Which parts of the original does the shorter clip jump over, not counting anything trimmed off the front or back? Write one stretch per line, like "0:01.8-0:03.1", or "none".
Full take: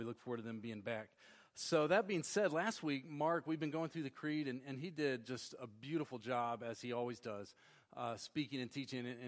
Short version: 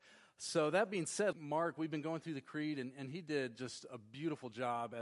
0:02.5-0:03.0